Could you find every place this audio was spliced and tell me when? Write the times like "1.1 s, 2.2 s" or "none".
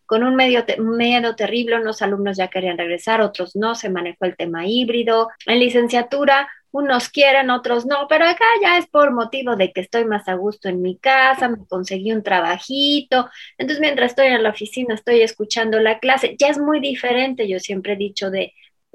5.4 s